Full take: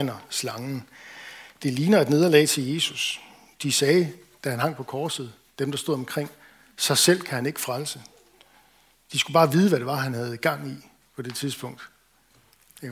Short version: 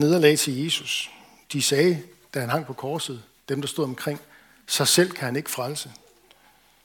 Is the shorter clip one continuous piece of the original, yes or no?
yes